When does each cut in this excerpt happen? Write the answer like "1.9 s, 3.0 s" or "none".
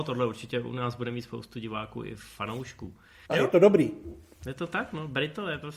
3.3 s